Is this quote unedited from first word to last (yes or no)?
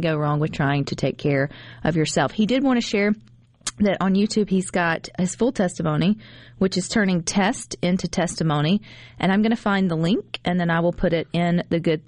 yes